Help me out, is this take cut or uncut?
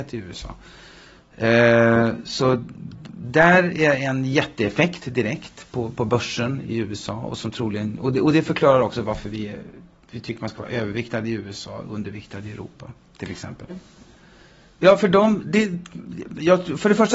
cut